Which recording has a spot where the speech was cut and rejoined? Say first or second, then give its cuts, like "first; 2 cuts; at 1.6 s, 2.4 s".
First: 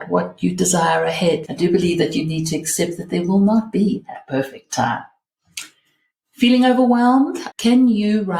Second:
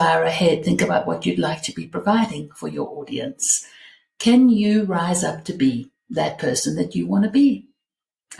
first; 2 cuts; at 1.4 s, 7.5 s